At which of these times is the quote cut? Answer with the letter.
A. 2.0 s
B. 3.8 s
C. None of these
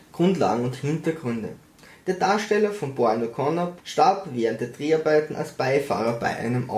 B